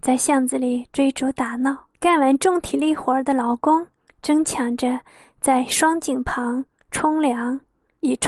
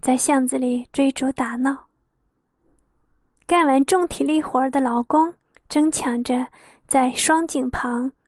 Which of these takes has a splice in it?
first; 1 cut; at 1.9 s

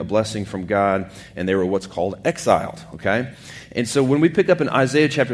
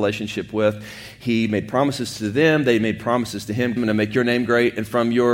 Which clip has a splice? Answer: second; 1 cut; at 3.8 s

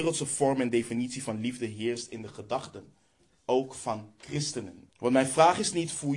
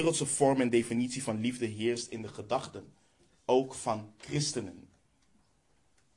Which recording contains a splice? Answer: first; 1 cut; at 4.9 s

